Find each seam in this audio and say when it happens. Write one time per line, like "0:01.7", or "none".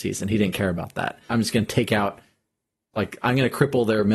0:01.3